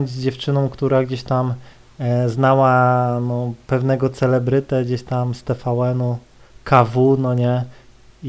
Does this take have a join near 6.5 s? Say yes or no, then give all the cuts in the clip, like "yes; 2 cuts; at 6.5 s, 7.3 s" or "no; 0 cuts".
no; 0 cuts